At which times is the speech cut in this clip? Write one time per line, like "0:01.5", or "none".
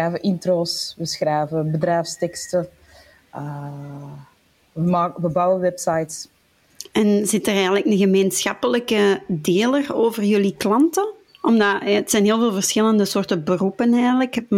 none

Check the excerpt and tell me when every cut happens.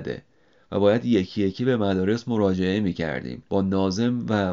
0:03.5

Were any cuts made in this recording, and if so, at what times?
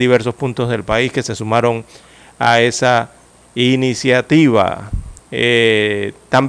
0:05.2

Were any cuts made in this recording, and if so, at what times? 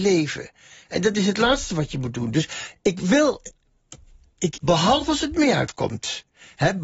0:04.6

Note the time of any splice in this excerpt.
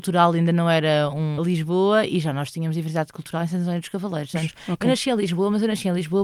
0:01.4
0:04.3

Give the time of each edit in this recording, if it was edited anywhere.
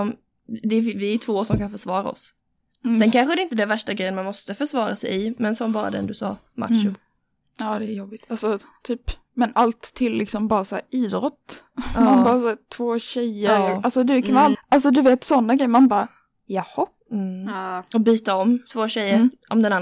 0:14.5

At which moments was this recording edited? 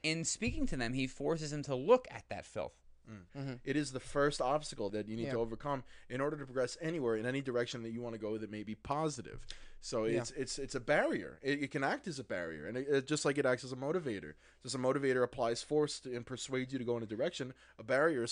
0:03.3
0:04.9

